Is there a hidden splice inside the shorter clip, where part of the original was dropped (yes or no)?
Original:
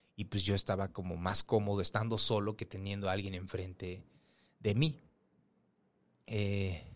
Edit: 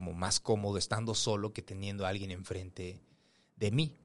no